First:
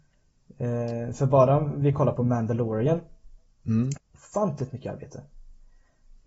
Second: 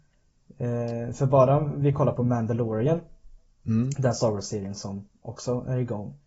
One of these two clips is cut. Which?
first; 1 cut; at 4.0 s

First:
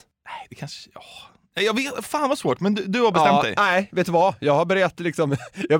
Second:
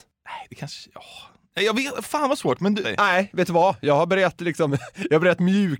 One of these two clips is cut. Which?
second; 1 cut; at 2.8 s

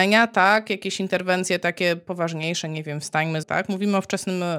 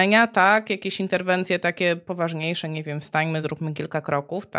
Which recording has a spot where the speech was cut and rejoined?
first; 1 cut; at 3.4 s

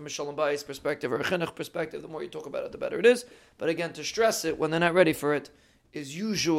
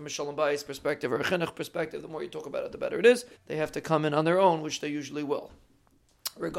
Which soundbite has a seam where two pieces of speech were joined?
second; 1 cut; at 3.3 s

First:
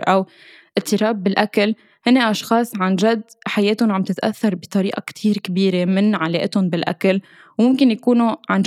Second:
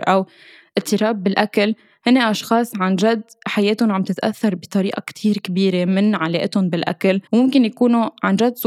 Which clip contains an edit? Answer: second; 1 cut; at 7.3 s

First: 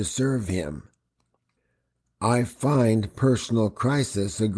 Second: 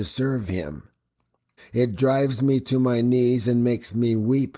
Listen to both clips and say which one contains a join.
second; 1 cut; at 1.6 s

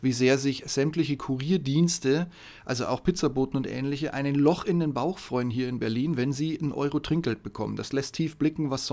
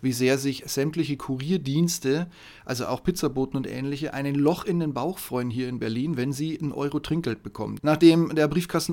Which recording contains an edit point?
second; 1 cut; at 7.8 s

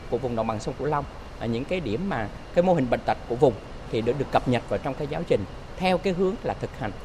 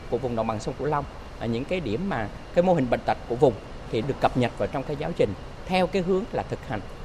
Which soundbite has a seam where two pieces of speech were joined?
second; 1 cut; at 4.0 s

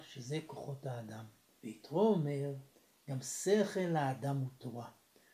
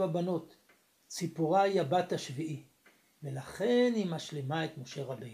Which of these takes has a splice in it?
first; 1 cut; at 1.6 s

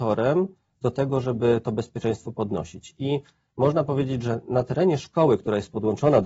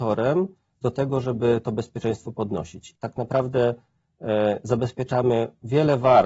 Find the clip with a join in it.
second; 1 cut; at 3.0 s

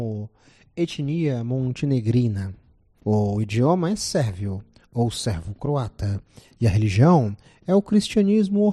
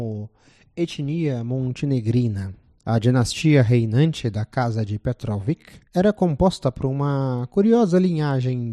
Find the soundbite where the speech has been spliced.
second; 2 cuts; at 2.8 s, 5.9 s

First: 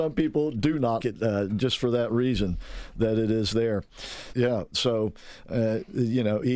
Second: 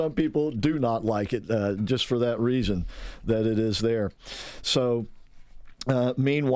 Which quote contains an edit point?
first; 2 cuts; at 1.0 s, 4.3 s

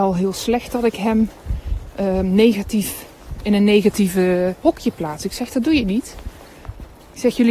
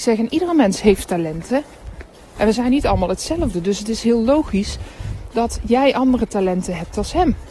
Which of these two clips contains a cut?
first; 1 cut; at 4.6 s

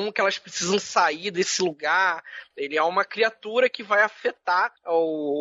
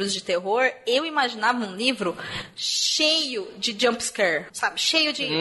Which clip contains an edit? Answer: first; 1 cut; at 2.5 s

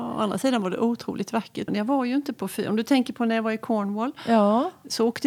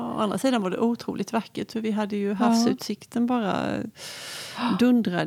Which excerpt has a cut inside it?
first; 1 cut; at 1.7 s

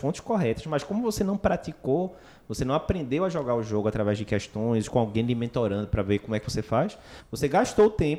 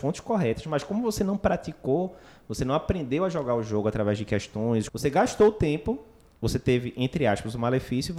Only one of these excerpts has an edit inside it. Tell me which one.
second; 1 cut; at 4.9 s

